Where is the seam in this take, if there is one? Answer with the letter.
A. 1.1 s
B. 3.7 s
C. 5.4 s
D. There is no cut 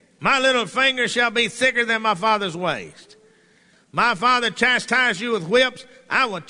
B